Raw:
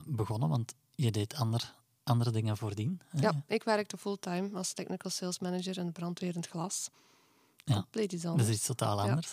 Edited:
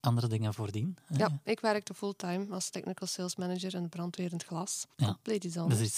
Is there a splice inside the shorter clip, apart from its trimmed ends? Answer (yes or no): yes